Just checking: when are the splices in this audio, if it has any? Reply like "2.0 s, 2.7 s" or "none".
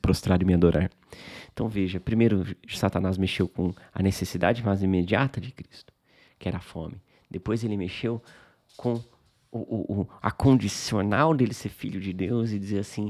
none